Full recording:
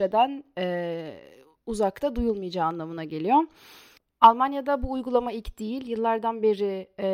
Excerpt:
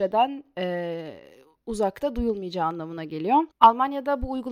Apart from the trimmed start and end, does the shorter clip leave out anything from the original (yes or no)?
yes